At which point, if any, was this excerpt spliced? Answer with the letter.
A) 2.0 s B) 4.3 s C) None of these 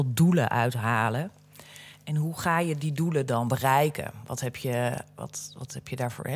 C